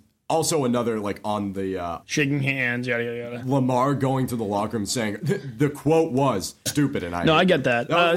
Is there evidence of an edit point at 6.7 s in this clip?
yes; 3 cuts; at 2.0 s, 5.2 s, 6.7 s

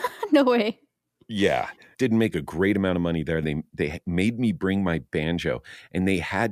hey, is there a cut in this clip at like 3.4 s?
yes; 2 cuts; at 1.9 s, 3.4 s

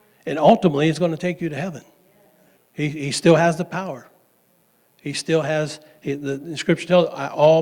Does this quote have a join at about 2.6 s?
yes; 1 cut; at 2.6 s

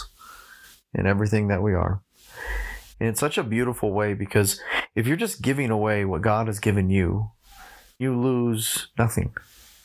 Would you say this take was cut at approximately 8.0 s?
yes; 2 cuts; at 2.9 s, 8.0 s

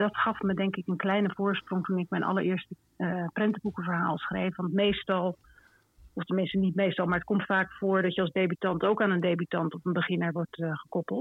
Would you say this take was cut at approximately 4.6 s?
no; 0 cuts

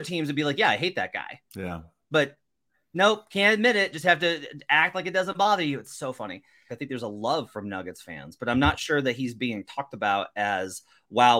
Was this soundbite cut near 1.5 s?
yes; 2 cuts; at 1.5 s, 6.7 s

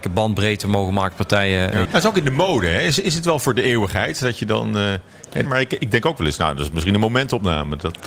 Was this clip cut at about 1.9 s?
yes; 2 cuts; at 1.9 s, 5.5 s

